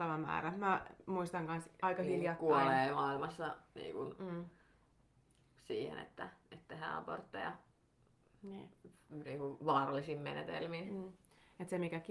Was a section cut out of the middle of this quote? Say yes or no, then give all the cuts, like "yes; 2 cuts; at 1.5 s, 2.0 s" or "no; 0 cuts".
no; 0 cuts